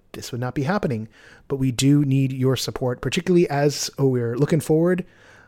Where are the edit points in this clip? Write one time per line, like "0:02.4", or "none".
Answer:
none